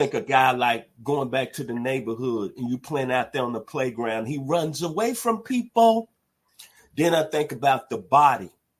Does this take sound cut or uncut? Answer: uncut